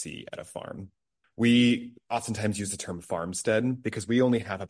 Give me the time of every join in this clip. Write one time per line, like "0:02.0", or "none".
0:01.2